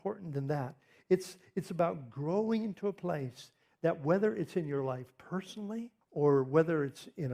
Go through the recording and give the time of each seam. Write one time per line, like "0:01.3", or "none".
0:06.0